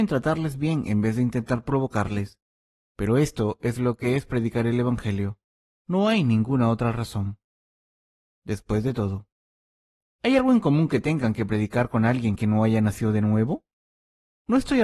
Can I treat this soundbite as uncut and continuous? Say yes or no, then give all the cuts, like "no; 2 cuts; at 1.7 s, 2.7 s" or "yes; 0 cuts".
yes; 0 cuts